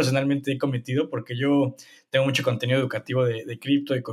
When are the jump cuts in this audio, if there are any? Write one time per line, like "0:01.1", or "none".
none